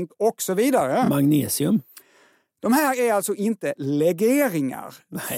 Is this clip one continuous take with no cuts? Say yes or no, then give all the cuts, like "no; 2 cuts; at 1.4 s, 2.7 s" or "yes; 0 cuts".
yes; 0 cuts